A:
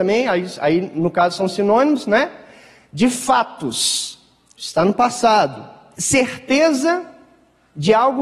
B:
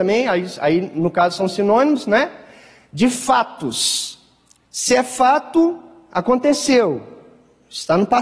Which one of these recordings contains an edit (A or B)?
A